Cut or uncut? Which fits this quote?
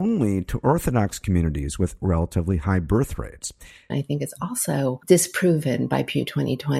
cut